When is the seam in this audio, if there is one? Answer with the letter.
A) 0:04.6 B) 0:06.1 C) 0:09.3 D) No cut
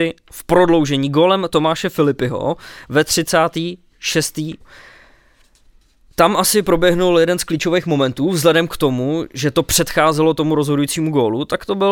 A